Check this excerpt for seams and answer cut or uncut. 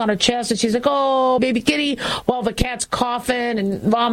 cut